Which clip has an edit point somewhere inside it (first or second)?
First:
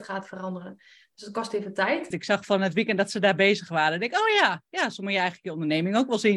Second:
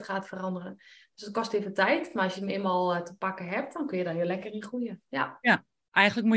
first